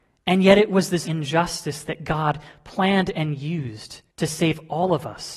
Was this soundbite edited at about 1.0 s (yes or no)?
yes